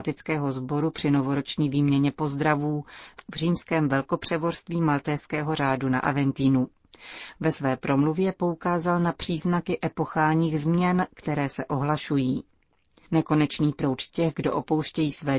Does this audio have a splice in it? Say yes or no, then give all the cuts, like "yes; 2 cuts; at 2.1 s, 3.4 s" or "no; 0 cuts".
no; 0 cuts